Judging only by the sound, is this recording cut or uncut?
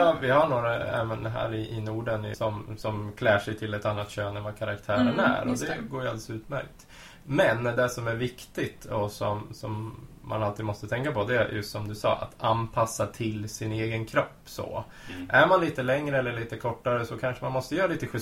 cut